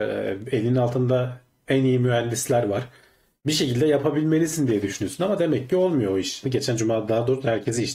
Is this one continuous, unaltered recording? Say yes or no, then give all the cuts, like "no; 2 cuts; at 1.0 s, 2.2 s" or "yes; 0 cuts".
no; 1 cut; at 6.4 s